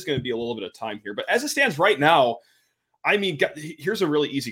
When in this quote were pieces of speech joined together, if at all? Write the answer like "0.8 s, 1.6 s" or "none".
none